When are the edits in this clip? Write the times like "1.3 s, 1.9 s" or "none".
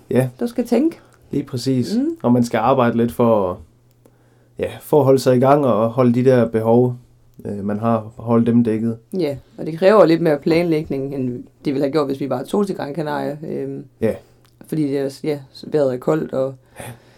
none